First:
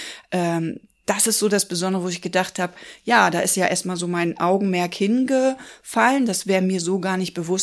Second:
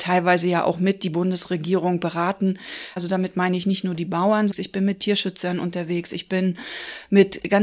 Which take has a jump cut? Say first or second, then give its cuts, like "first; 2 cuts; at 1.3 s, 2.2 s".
second; 2 cuts; at 3.0 s, 4.5 s